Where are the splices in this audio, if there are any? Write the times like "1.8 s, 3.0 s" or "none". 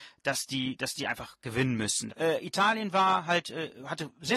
2.1 s